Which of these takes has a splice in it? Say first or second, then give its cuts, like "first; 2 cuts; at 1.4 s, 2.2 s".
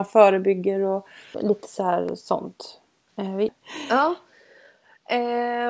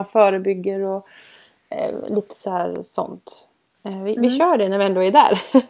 first; 2 cuts; at 1.3 s, 3.5 s